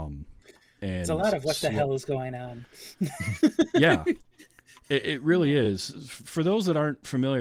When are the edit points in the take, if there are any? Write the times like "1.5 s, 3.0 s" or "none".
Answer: none